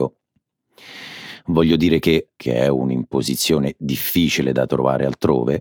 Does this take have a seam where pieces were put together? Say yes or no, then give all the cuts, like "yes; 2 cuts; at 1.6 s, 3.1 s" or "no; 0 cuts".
yes; 1 cut; at 2.3 s